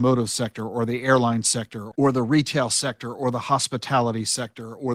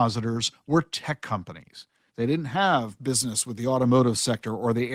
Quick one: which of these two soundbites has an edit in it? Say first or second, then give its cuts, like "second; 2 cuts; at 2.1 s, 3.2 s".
second; 1 cut; at 2.1 s